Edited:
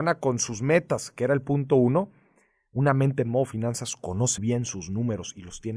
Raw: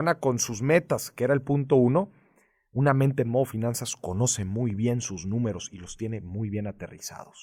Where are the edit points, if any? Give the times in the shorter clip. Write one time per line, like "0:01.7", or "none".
0:04.4